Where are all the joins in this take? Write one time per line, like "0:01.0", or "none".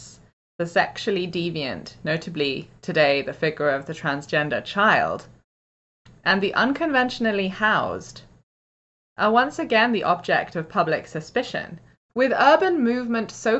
0:12.1